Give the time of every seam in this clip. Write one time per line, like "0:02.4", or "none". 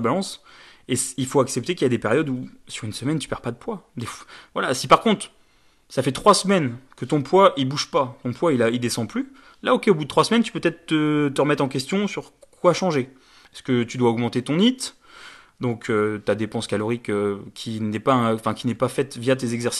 none